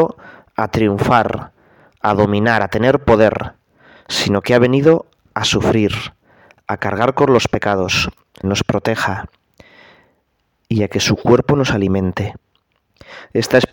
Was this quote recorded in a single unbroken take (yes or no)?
no